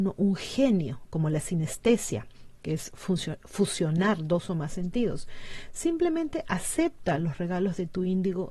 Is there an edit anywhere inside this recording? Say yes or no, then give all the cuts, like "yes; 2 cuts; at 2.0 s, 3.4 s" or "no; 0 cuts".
no; 0 cuts